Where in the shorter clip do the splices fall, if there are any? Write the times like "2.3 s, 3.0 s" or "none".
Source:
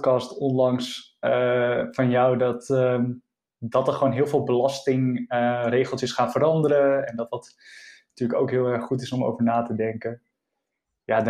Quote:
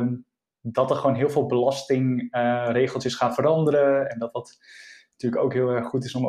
none